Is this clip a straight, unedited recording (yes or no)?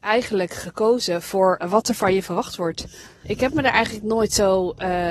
no